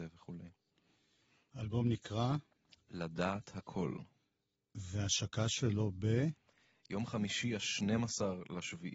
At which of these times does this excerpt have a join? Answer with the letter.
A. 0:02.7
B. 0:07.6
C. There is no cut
C